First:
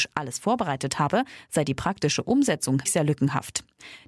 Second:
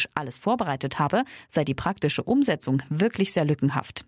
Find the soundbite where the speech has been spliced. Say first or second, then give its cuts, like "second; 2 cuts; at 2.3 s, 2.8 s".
first; 1 cut; at 2.9 s